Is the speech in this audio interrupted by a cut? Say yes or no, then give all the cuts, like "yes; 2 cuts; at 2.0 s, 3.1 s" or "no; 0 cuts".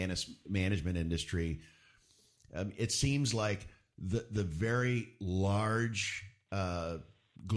no; 0 cuts